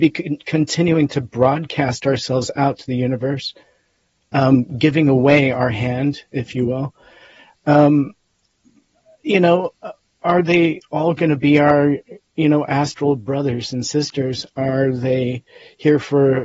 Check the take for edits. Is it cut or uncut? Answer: uncut